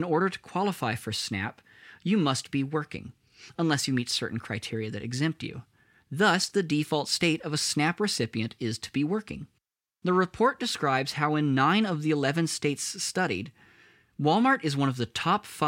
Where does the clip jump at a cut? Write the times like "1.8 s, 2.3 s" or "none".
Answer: none